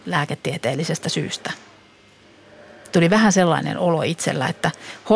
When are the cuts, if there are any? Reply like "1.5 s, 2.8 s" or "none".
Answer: none